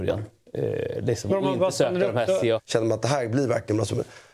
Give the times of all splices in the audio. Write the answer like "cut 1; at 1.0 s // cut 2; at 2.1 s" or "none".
cut 1; at 1.3 s // cut 2; at 2.6 s